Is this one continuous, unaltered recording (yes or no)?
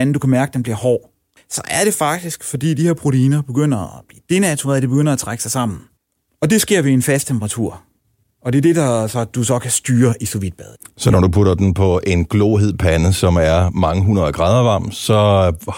yes